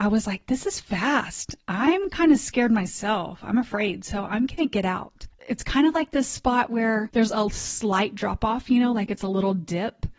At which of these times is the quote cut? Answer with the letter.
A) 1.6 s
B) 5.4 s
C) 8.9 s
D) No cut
B